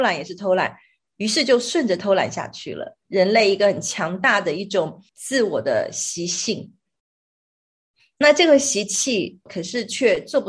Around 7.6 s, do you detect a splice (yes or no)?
no